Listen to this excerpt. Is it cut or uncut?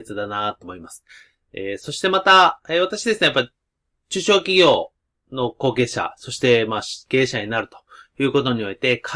uncut